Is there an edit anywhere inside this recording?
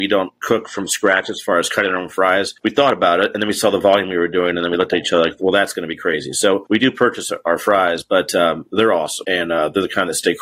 no; 0 cuts

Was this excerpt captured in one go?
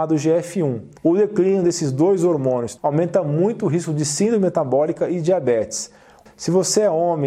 no; 3 cuts; at 1.0 s, 2.8 s, 6.3 s

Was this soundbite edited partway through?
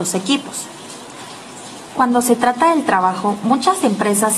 yes; 1 cut; at 1.9 s

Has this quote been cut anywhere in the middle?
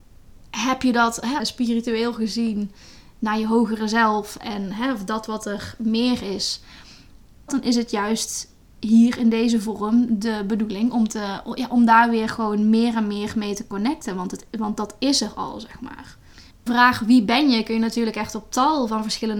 yes; 3 cuts; at 1.4 s, 7.5 s, 16.5 s

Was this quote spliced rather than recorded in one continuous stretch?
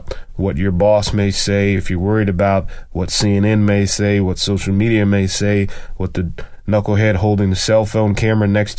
no; 0 cuts

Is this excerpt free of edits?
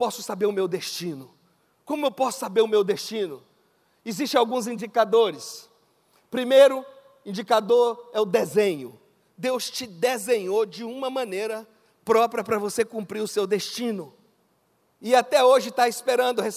no; 2 cuts; at 1.7 s, 14.8 s

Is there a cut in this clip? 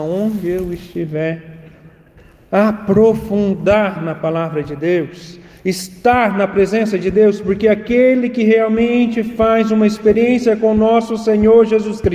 no; 0 cuts

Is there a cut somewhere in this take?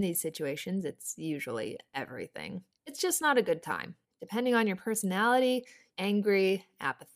yes; 1 cut; at 5.9 s

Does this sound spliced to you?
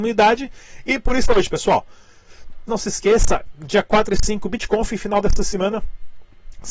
yes; 1 cut; at 2.7 s

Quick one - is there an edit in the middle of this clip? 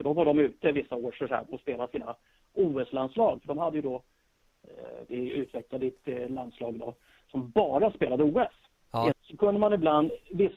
yes; 2 cuts; at 5.1 s, 9.1 s

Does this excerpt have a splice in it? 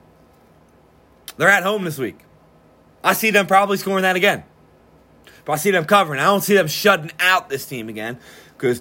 no; 0 cuts

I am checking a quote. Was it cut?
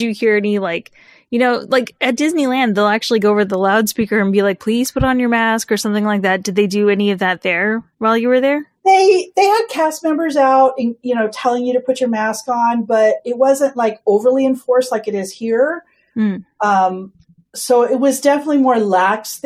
no; 0 cuts

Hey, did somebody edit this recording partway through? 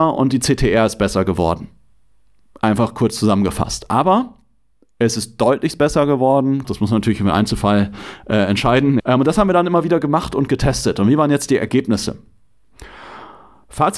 yes; 2 cuts; at 6.6 s, 9.0 s

